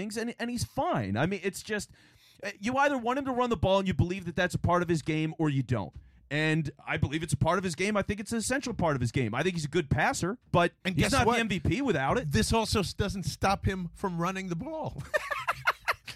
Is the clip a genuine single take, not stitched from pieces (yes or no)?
yes